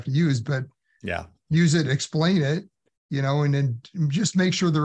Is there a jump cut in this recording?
no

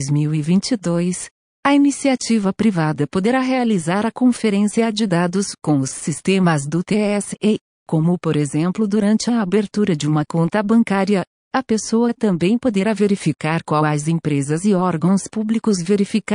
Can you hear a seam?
yes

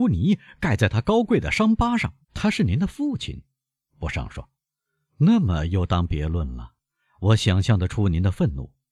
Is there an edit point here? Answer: yes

